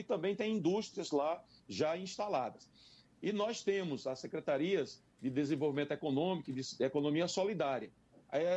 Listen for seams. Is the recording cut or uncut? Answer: uncut